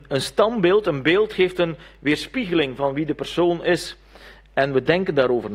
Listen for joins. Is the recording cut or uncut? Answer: uncut